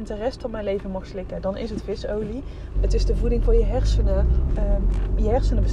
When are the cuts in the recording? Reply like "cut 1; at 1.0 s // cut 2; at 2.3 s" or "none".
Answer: cut 1; at 2.7 s // cut 2; at 4.5 s